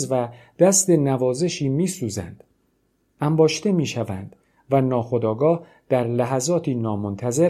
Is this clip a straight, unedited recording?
yes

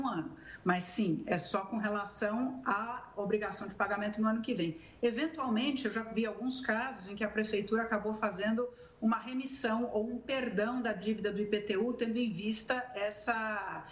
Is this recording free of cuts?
yes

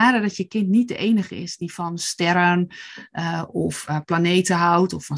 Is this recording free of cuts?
yes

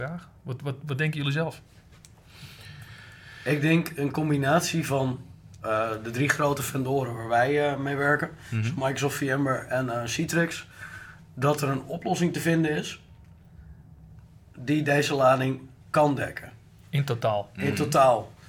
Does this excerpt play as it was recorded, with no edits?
yes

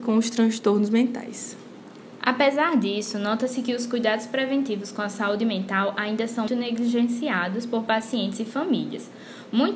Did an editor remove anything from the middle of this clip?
yes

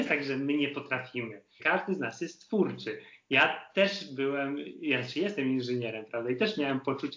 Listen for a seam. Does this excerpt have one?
yes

